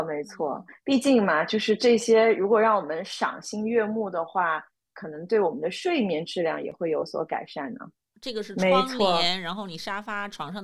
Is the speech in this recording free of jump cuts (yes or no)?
no